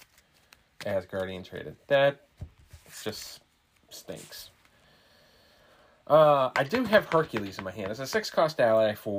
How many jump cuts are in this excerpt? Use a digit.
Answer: 0